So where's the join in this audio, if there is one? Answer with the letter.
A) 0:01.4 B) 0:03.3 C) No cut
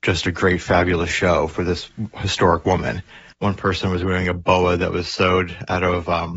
B